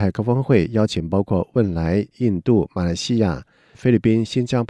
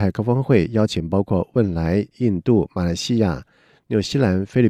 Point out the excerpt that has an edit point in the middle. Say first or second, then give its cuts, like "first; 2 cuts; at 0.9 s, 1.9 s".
first; 1 cut; at 3.7 s